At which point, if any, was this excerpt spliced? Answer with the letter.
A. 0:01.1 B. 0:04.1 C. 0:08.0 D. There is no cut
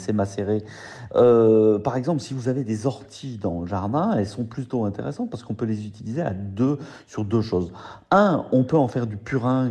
A